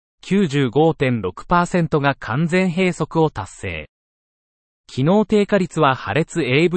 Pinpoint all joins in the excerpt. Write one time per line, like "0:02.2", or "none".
none